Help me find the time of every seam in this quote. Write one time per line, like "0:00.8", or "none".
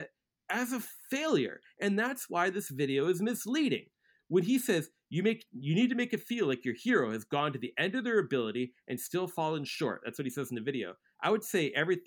none